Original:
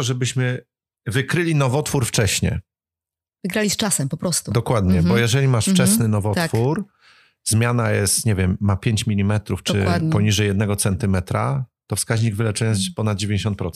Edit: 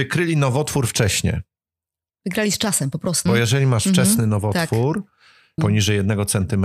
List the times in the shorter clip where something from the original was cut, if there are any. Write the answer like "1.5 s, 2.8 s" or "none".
3.3 s, 5.6 s